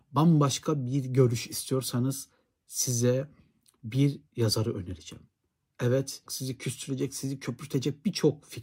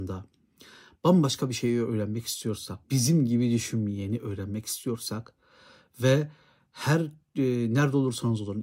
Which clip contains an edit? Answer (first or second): first